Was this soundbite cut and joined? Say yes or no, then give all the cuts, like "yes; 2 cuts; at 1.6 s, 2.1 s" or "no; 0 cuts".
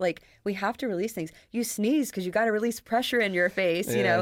no; 0 cuts